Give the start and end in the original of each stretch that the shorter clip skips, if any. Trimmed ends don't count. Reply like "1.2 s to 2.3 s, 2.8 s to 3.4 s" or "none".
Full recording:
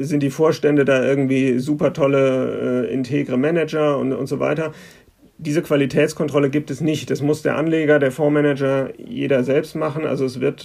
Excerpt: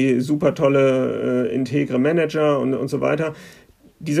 none